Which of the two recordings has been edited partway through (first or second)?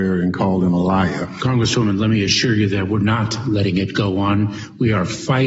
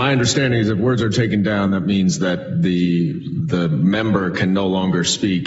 first